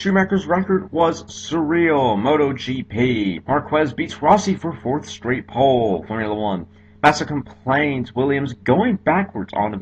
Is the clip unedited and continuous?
no; 1 cut; at 3.4 s

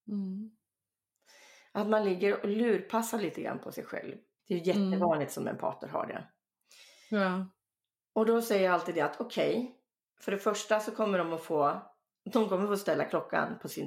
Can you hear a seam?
yes; 1 cut; at 4.4 s

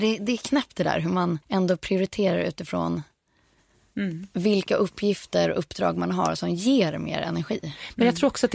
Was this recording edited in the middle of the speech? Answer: yes; 1 cut; at 1.4 s

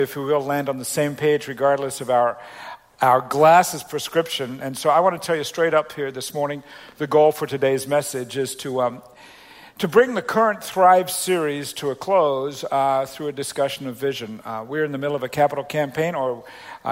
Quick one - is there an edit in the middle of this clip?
no; 0 cuts

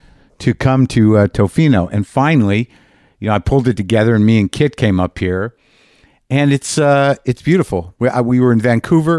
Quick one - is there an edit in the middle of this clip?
no; 0 cuts

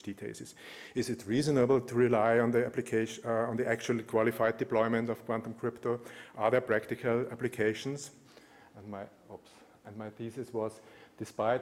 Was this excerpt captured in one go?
yes; 0 cuts

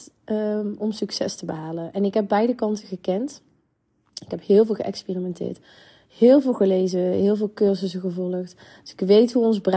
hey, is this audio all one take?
yes; 0 cuts

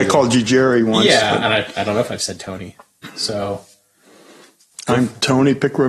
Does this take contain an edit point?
no; 0 cuts

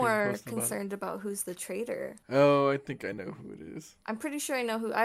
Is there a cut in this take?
no; 0 cuts

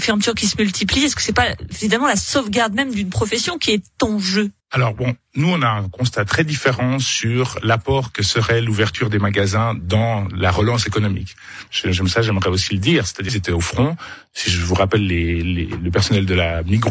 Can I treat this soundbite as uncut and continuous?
no; 3 cuts; at 4.6 s, 11.7 s, 13.3 s

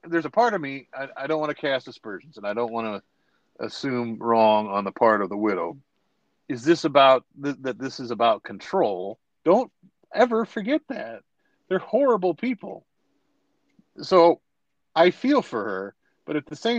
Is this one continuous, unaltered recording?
no; 2 cuts; at 6.4 s, 9.4 s

